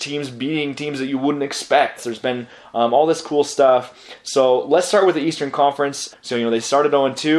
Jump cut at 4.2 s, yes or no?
no